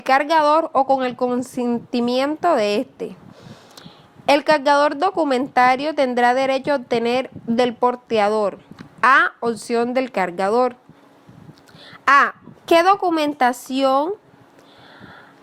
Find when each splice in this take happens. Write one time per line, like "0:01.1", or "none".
0:12.5